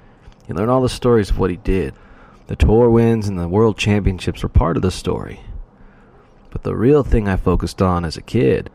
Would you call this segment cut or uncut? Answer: uncut